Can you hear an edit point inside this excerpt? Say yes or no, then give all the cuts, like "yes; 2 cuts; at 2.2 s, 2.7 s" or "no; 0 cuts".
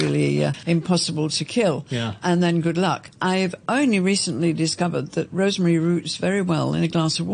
no; 0 cuts